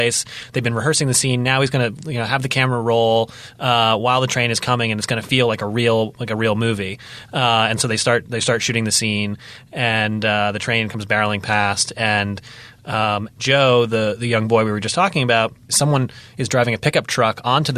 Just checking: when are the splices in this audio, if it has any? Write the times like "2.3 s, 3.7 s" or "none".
13.3 s, 15.7 s